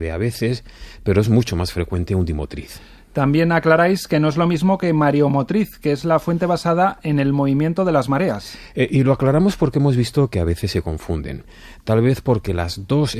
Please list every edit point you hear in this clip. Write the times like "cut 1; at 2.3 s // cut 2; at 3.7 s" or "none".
none